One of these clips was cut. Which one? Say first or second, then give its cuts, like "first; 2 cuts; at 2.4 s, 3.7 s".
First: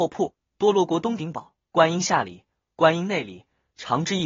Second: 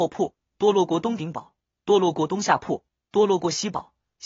first; 1 cut; at 1.6 s